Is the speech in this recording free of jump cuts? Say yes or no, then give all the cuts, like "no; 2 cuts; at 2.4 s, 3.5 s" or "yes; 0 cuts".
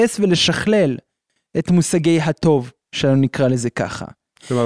yes; 0 cuts